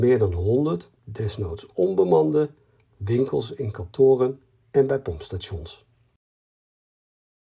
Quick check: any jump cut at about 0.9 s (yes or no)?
yes